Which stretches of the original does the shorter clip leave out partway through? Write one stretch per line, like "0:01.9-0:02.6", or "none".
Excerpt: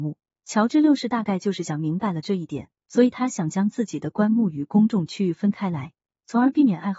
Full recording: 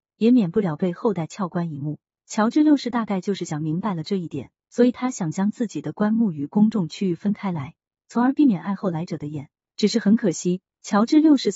none